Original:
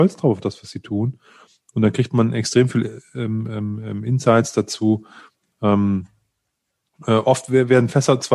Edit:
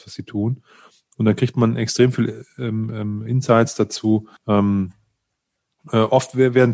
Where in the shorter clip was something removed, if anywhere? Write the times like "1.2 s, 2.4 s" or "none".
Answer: 3.3 s, 4.4 s